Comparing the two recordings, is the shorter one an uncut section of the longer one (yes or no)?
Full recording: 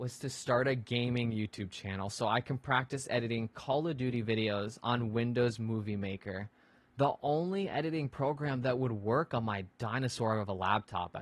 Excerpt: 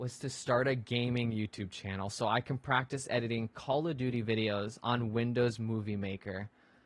yes